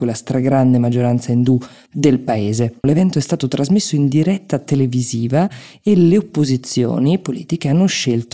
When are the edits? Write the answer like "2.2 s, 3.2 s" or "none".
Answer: 2.8 s